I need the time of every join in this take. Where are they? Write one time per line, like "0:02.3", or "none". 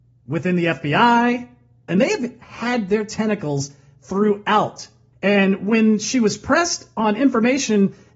0:01.9
0:05.1